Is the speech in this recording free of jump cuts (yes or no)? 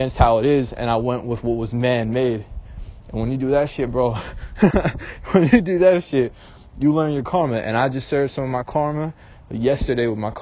yes